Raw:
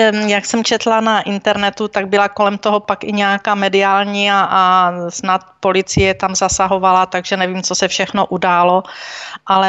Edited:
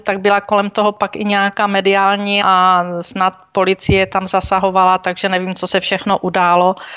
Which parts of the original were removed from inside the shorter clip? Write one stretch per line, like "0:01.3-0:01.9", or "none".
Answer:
0:04.3-0:04.5